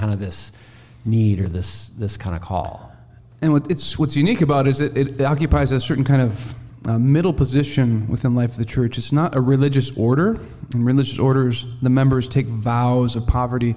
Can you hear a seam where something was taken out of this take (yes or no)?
yes